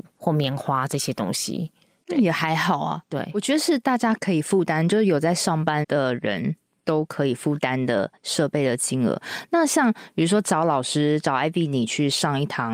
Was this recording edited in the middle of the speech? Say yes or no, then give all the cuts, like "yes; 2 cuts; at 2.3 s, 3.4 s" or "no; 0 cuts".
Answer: yes; 1 cut; at 5.8 s